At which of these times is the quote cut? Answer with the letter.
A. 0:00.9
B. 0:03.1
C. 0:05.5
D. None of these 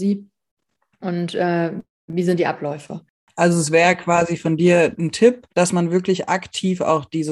C